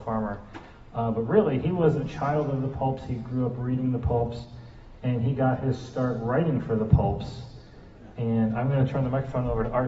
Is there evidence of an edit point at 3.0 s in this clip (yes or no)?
no